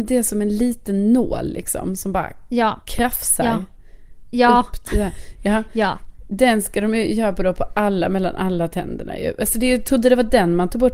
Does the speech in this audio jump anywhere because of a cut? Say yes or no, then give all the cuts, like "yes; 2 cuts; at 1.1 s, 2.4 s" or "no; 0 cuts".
no; 0 cuts